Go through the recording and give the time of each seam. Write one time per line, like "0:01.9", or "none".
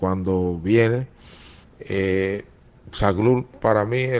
0:01.6